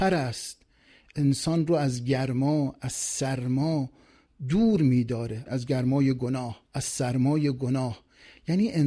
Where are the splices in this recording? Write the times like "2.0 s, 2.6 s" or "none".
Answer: 5.5 s, 6.7 s